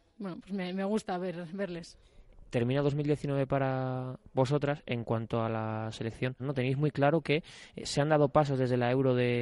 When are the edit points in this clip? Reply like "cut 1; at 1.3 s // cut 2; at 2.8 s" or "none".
cut 1; at 6.4 s

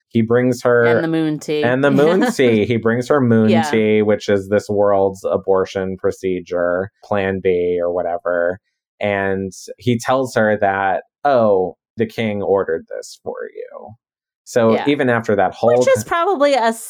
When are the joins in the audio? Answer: none

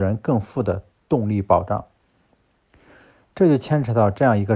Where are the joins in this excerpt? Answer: none

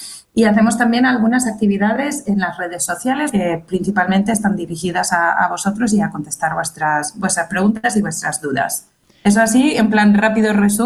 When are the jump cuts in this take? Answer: cut 1; at 3.3 s

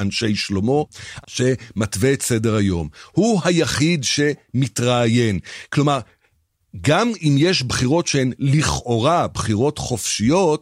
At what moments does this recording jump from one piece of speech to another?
cut 1; at 1.2 s

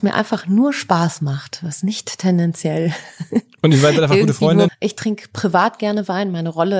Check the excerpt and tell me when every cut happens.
cut 1; at 4.7 s

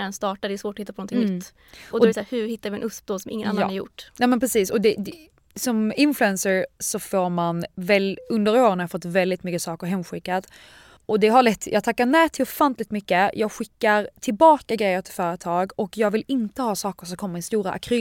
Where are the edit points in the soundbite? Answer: cut 1; at 11.0 s

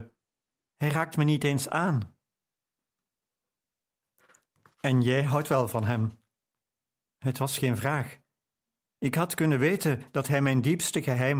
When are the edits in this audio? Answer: none

